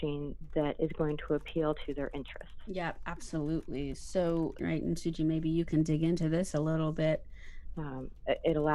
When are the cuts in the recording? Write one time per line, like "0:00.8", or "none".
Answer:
0:04.6
0:07.7